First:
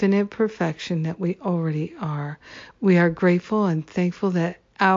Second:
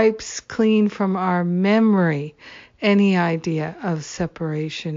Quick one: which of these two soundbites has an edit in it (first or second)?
first